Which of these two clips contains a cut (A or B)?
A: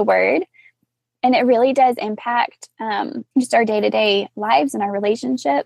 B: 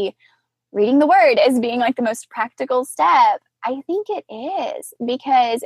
A